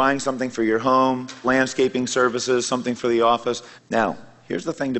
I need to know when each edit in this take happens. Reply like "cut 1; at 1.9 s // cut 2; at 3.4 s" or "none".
cut 1; at 1.4 s // cut 2; at 3.8 s